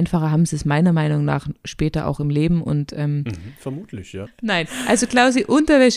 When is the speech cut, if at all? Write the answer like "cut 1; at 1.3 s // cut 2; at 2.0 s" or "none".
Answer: cut 1; at 4.3 s